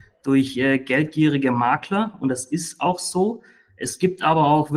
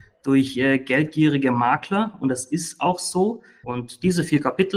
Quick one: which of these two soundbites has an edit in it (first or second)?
second